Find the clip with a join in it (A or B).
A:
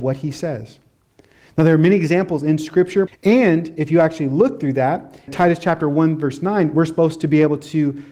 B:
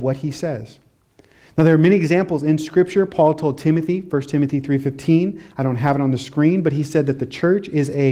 A